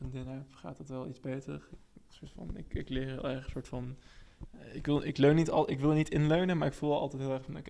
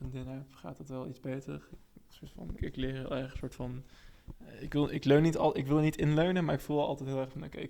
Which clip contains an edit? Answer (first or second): second